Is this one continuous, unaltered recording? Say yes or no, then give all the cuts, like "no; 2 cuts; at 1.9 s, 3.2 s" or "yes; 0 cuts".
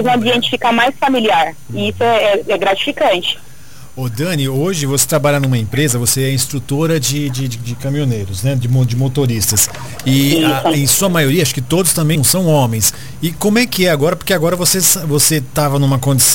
no; 1 cut; at 12.2 s